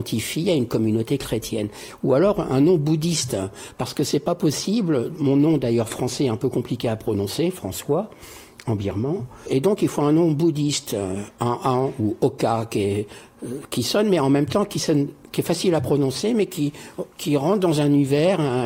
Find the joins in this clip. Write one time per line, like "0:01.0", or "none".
0:17.1